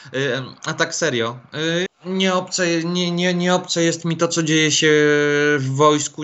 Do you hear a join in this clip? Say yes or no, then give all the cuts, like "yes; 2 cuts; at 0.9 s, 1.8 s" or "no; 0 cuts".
yes; 1 cut; at 1.9 s